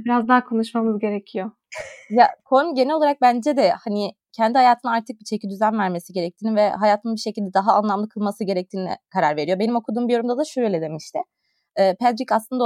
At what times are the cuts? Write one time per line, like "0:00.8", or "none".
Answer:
none